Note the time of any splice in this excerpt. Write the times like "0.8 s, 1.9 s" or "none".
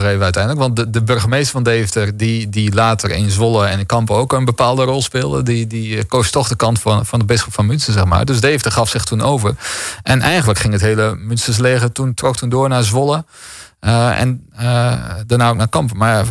none